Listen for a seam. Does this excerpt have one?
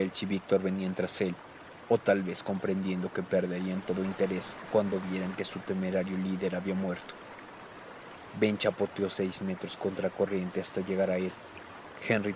no; 0 cuts

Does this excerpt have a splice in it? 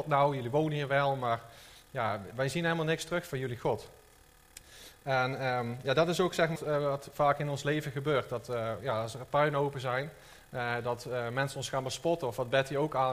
yes; 1 cut; at 6.6 s

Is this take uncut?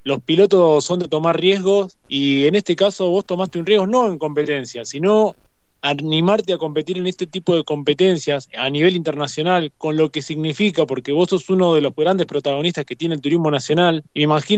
yes; 0 cuts

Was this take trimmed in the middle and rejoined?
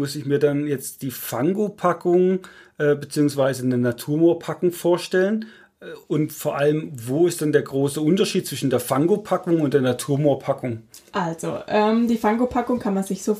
no; 0 cuts

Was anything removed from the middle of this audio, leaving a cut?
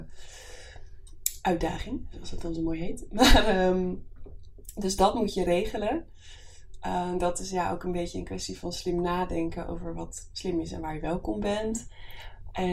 yes; 1 cut; at 1.4 s

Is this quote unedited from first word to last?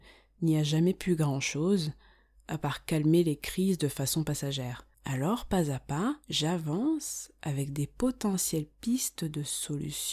no; 2 cuts; at 4.9 s, 6.2 s

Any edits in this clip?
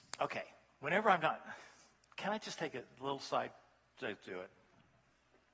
no; 0 cuts

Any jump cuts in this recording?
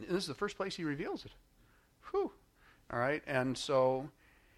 no; 0 cuts

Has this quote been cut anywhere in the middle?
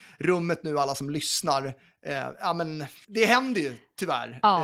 yes; 1 cut; at 3.0 s

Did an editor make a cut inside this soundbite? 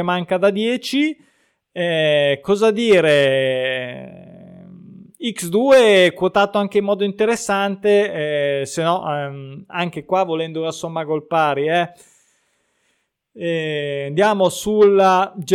no; 0 cuts

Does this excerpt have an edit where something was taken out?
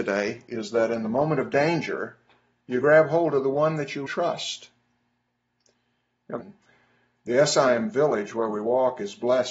yes; 2 cuts; at 4.1 s, 6.4 s

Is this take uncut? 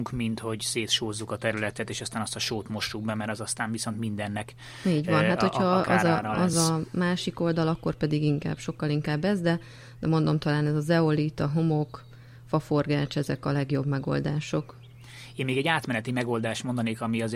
yes; 0 cuts

